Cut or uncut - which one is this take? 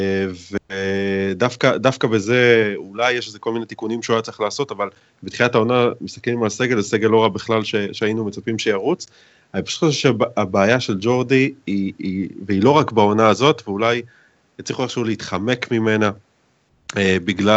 uncut